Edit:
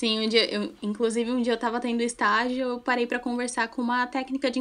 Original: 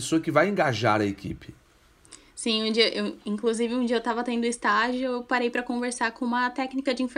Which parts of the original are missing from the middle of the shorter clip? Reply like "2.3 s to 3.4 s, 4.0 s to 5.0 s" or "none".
none